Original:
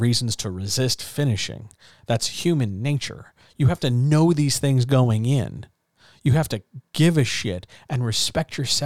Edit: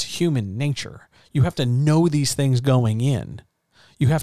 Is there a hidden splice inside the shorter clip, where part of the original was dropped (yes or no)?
no